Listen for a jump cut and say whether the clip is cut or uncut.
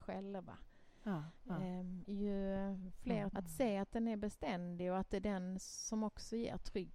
cut